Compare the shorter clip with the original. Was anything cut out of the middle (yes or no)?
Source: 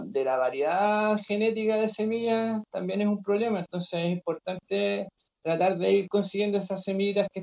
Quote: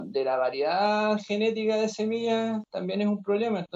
no